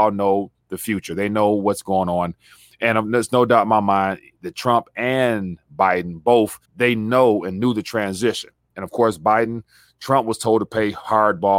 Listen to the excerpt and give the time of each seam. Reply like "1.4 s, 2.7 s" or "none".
6.6 s